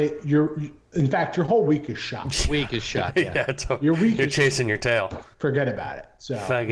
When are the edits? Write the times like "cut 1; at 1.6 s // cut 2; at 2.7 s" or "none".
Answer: cut 1; at 5.3 s